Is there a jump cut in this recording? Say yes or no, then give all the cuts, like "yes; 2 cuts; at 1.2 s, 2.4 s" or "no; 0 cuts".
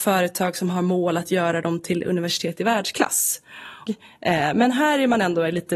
yes; 1 cut; at 3.9 s